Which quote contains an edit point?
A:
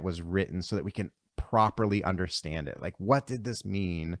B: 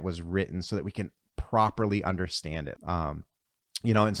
B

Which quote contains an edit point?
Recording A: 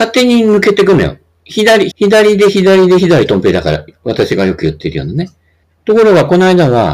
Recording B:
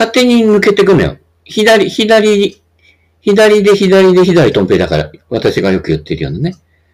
A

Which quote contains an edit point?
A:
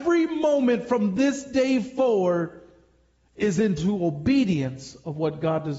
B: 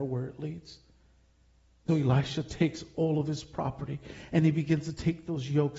B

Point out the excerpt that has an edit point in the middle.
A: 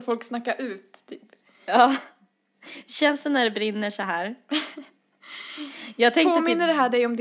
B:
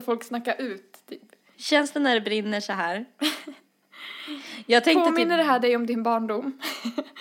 B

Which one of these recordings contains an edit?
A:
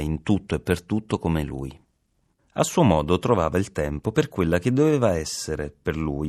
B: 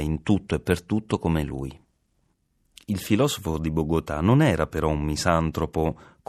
A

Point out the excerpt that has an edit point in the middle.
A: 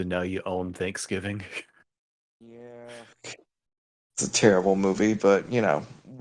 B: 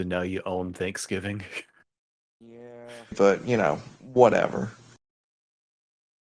B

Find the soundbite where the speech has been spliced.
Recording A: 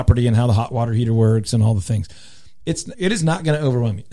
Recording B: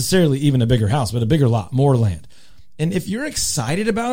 A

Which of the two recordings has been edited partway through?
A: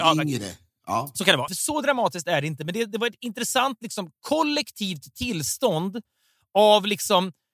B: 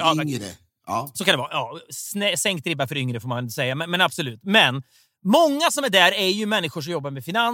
A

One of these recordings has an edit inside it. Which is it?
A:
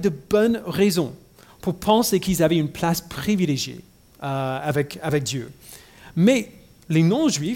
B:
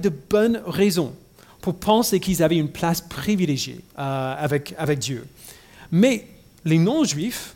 B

